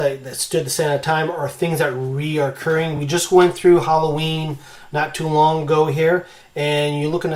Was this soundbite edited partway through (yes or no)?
no